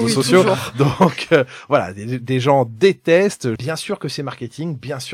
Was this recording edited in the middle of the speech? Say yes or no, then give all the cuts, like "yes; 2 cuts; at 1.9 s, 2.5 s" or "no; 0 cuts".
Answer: yes; 1 cut; at 3.6 s